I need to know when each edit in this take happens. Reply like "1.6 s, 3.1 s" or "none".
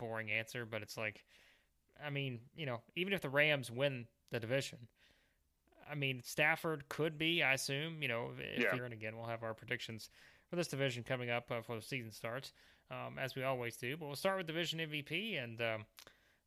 8.8 s